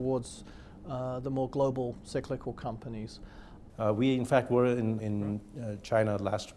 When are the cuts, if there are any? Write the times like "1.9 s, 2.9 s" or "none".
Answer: 3.7 s, 5.0 s